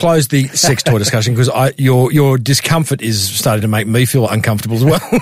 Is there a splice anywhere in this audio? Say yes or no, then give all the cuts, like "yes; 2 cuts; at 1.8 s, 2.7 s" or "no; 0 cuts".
no; 0 cuts